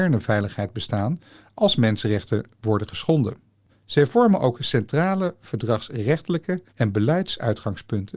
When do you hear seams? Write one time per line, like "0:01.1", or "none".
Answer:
0:03.7
0:06.7